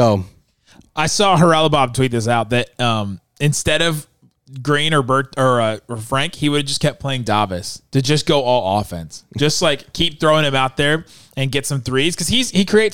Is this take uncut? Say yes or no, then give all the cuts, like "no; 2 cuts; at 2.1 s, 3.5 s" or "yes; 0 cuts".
yes; 0 cuts